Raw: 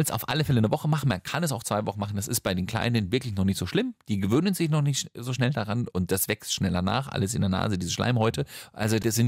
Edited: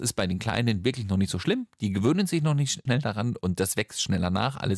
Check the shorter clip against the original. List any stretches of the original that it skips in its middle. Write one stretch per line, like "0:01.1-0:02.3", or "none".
0:05.1-0:05.4